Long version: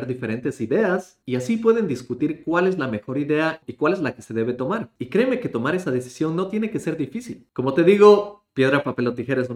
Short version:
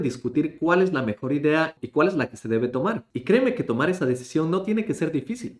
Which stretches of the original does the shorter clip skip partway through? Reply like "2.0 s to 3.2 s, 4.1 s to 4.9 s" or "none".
none